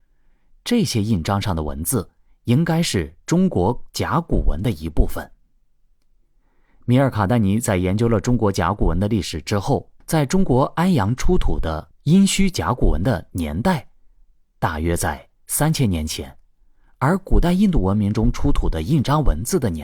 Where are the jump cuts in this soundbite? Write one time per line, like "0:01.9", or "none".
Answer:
0:10.0